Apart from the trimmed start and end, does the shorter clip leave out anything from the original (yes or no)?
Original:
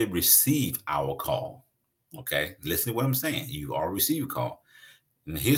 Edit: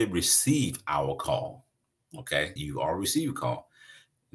yes